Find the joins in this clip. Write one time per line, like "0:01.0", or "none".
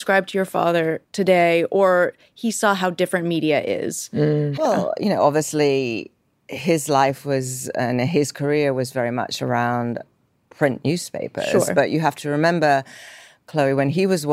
0:01.1
0:04.6